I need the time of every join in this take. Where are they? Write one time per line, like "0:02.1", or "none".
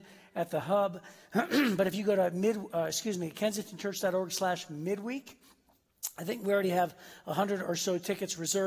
none